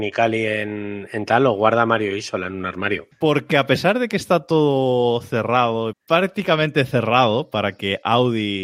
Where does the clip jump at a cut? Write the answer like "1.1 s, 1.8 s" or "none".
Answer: 3.1 s, 5.9 s